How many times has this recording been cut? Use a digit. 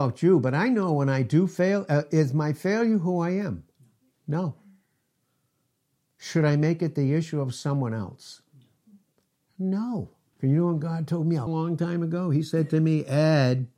2